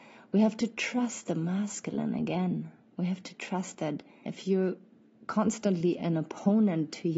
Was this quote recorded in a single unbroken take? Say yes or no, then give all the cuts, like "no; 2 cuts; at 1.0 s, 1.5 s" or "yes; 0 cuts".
no; 1 cut; at 4.3 s